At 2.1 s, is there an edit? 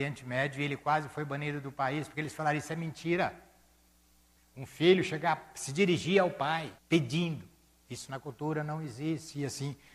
no; 2 cuts; at 4.4 s, 6.8 s

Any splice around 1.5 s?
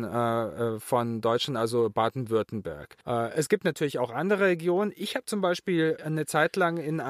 no; 2 cuts; at 3.0 s, 6.0 s

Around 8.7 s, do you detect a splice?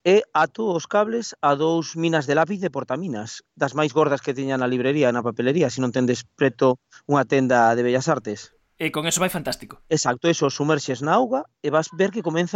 no; 0 cuts

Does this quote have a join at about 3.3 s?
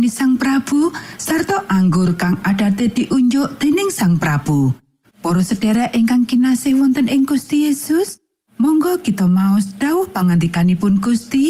no; 1 cut; at 5.1 s

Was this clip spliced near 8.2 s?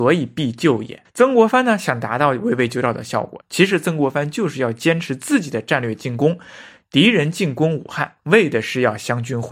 no; 1 cut; at 1.0 s

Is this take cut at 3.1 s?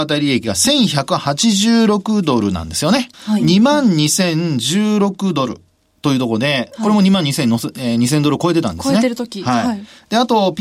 yes; 1 cut; at 3.1 s

